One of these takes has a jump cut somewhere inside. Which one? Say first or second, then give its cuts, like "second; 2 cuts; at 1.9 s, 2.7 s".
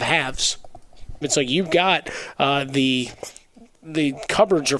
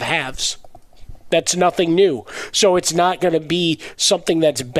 first; 1 cut; at 1.2 s